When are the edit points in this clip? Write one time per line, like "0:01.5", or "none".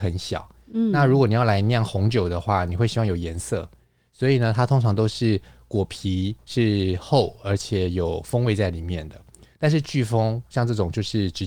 none